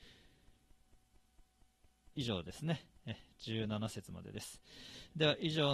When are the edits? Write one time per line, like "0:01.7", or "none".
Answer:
0:02.1